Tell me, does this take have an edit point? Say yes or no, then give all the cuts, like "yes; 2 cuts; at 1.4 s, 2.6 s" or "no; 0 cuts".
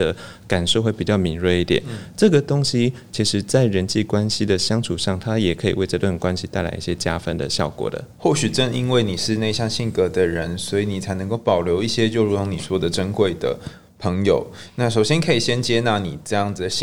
yes; 1 cut; at 8.1 s